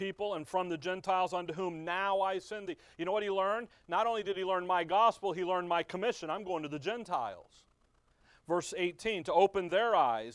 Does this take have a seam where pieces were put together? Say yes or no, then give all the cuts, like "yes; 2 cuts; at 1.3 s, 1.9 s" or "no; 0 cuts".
no; 0 cuts